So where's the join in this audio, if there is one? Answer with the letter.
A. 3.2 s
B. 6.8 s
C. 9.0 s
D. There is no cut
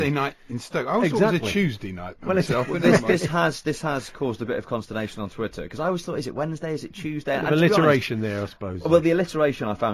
D